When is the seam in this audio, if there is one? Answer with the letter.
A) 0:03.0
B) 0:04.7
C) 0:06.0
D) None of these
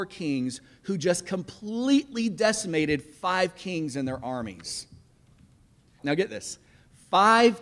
C